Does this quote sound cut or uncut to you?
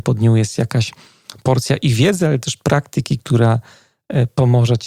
uncut